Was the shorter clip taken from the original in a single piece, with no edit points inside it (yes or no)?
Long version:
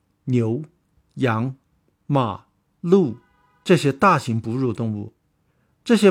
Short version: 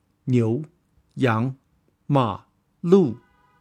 yes